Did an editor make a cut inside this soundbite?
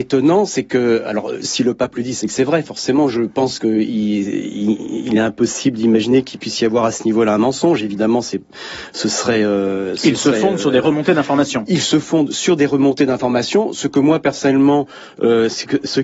no; 0 cuts

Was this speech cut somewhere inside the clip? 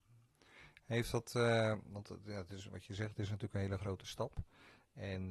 no; 0 cuts

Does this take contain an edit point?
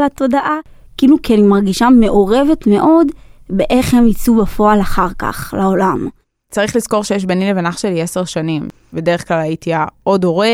no; 0 cuts

